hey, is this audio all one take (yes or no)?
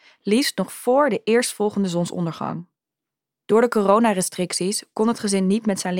yes